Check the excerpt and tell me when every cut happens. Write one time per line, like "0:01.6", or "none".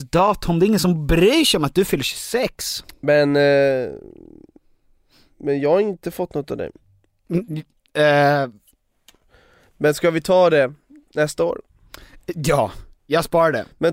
none